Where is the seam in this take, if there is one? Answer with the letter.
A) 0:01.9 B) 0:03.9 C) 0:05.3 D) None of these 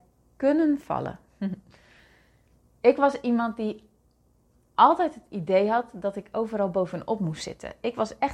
D